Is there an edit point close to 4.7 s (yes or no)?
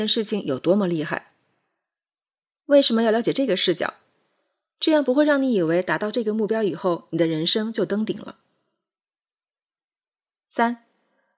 no